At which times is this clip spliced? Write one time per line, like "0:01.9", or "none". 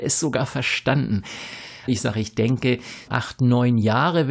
0:01.9
0:03.1